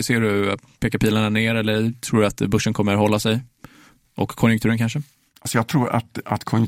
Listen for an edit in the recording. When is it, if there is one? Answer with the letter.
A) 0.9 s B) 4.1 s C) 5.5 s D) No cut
D